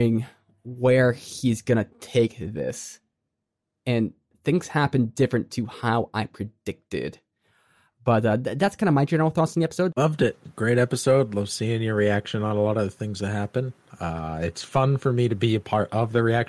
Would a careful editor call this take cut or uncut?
cut